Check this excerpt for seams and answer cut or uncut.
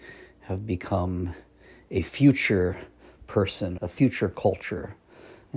cut